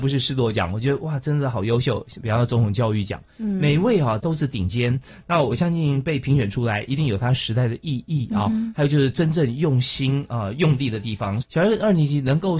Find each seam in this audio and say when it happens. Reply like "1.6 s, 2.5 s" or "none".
4.2 s, 11.4 s